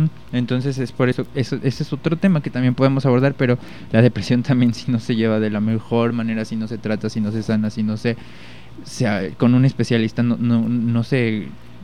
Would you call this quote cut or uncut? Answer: uncut